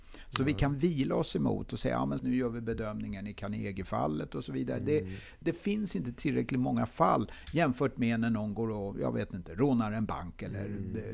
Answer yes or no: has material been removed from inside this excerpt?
yes